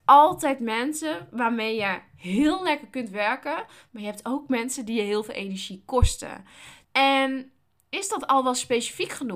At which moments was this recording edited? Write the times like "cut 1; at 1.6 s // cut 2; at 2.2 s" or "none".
cut 1; at 3.9 s // cut 2; at 6.8 s